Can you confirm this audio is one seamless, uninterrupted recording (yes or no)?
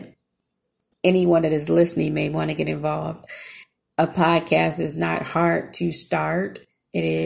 yes